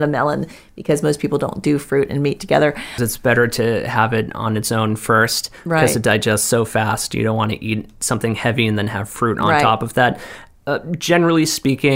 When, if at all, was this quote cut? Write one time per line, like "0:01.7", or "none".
0:03.0